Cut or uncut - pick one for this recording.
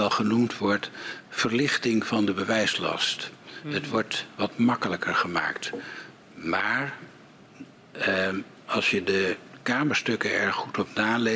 uncut